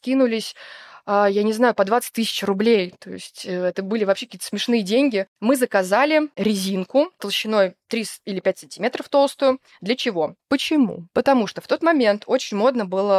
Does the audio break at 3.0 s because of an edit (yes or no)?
no